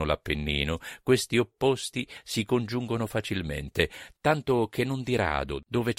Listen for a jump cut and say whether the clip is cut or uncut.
uncut